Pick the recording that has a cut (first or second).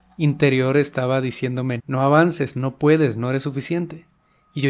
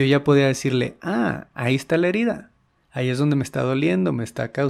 first